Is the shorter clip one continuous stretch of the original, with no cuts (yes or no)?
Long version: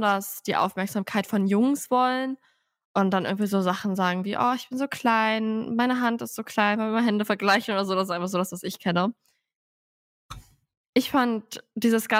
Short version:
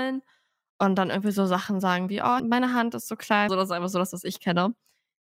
no